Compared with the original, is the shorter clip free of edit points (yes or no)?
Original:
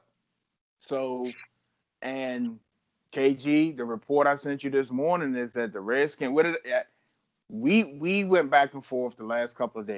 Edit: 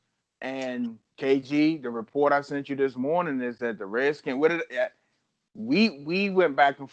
no